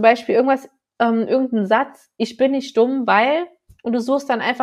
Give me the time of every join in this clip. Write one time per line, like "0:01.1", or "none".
none